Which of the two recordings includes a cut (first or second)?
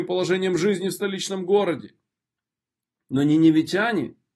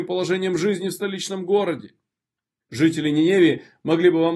second